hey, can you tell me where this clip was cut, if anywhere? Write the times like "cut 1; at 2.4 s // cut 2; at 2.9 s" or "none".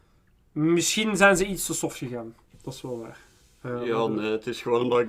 none